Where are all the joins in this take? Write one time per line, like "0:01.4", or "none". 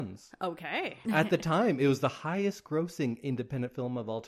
0:01.0

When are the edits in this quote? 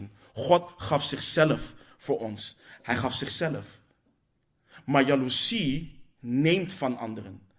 0:02.8

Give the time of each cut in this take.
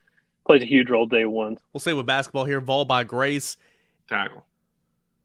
0:01.6
0:04.0

